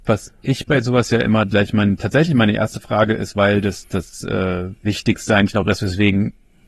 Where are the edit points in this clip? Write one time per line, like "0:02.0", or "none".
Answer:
0:04.8